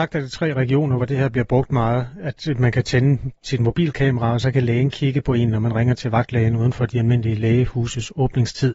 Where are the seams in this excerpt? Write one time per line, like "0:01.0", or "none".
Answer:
none